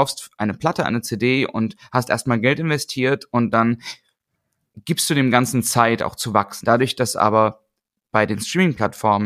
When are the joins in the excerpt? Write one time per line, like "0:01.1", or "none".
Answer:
0:06.6